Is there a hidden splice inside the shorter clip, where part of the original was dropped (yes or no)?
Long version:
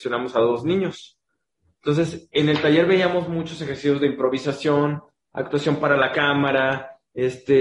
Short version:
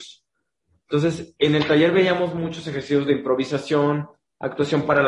no